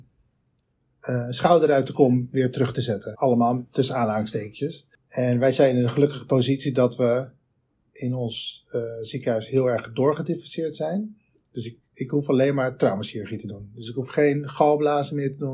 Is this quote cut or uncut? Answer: cut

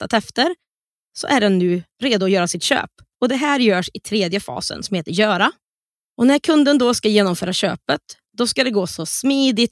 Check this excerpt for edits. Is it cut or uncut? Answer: uncut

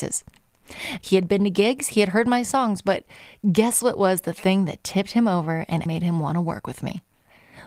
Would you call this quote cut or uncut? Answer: cut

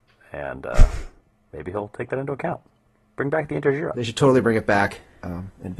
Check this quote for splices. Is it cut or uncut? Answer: cut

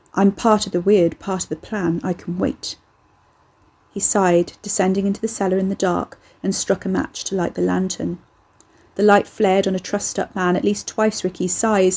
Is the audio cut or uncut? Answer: uncut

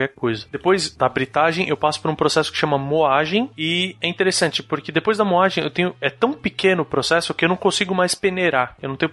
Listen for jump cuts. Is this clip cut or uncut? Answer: uncut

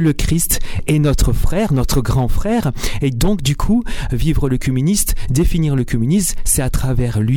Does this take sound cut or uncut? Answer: uncut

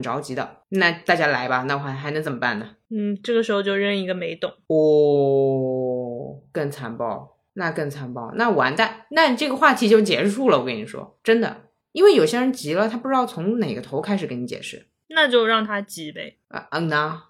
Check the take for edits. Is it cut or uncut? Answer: uncut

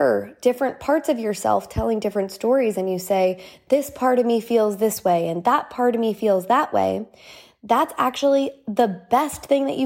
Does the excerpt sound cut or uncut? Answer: uncut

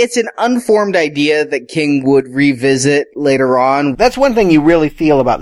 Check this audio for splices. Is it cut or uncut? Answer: cut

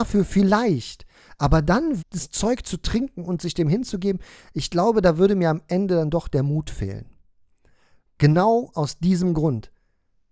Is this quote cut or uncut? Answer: cut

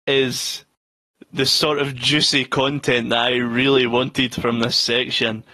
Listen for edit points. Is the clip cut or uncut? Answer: uncut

